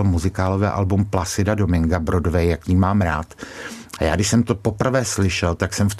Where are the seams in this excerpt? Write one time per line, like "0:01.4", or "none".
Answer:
0:04.0